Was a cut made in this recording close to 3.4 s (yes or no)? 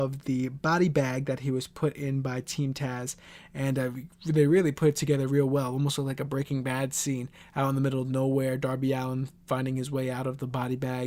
no